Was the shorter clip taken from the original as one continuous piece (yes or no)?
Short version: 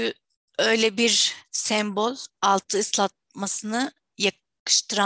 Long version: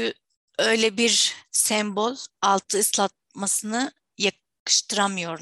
yes